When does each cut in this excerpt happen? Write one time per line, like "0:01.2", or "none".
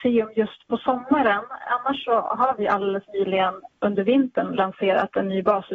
none